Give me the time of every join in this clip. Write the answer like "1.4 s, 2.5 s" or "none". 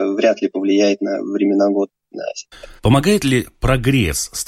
2.8 s